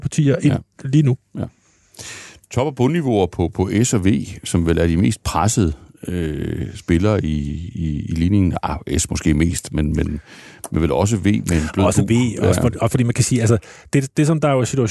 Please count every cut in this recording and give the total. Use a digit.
0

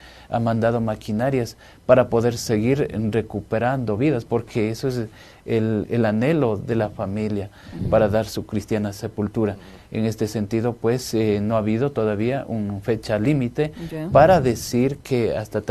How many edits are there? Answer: 0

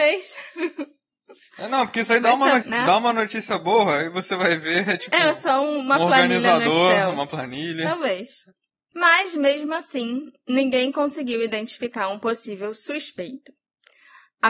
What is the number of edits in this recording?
1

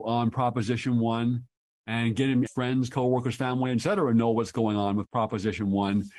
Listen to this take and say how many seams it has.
1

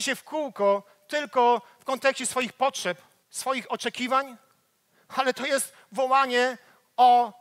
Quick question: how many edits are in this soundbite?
1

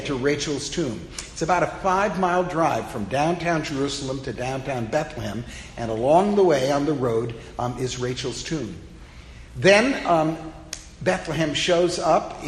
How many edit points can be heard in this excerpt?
0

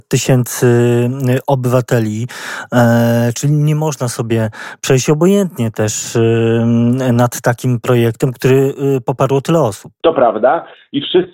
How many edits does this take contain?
1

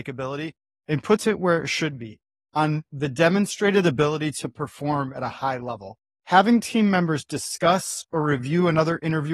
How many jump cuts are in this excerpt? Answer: 1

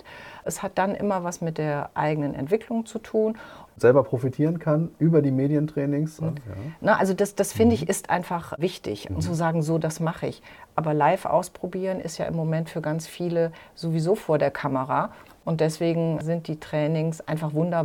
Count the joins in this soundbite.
3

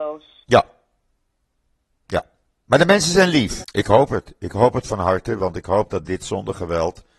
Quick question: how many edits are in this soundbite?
1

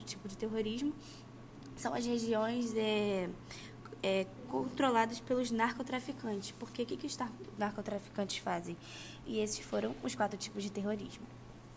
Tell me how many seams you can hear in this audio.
1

